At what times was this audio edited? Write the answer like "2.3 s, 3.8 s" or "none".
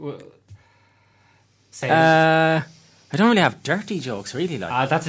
none